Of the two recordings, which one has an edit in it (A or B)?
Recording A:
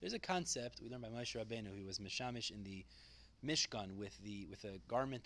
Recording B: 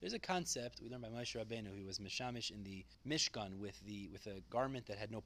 B